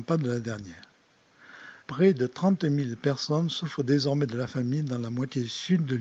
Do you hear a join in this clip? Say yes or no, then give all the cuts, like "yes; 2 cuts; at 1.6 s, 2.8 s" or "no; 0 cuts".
yes; 1 cut; at 1.8 s